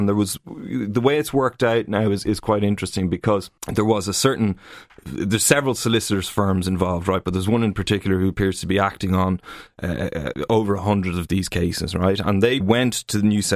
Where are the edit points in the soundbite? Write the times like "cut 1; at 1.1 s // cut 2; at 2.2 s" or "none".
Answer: cut 1; at 3.6 s // cut 2; at 12.6 s